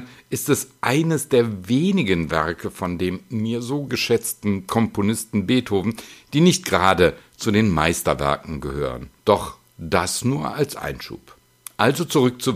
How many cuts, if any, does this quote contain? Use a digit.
1